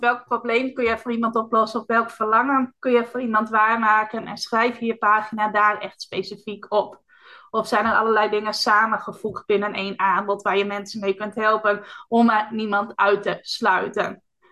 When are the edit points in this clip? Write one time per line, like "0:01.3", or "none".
none